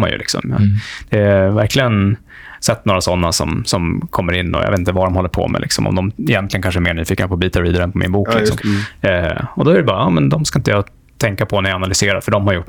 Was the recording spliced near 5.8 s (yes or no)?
no